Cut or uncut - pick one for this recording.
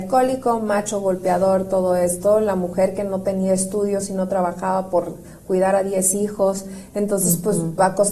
uncut